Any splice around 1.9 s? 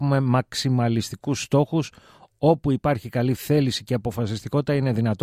no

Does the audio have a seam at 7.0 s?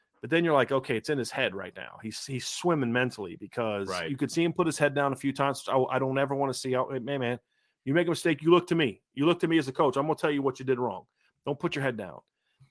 no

